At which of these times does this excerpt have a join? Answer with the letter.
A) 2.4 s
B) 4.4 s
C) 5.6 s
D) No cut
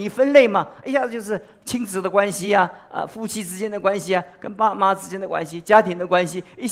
D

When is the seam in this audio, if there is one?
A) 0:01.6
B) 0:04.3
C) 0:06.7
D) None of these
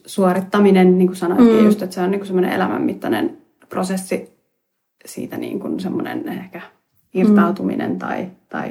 D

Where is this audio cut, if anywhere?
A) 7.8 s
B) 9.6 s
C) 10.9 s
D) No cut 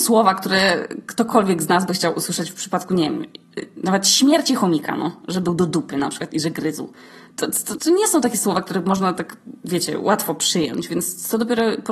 A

